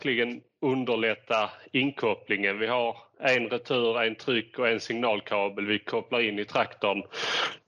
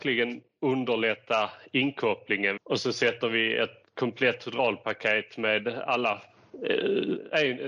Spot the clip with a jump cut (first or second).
second